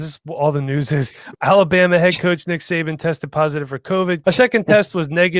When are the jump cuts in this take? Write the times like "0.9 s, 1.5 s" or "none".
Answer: 1.3 s, 4.2 s